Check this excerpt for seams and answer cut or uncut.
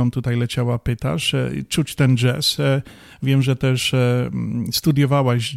uncut